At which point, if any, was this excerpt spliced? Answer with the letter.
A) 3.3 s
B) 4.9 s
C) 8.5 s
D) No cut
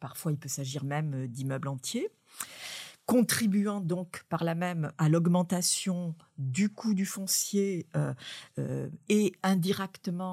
B